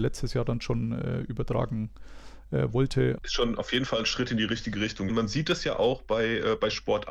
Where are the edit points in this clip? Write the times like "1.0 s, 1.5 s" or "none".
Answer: 3.2 s, 5.1 s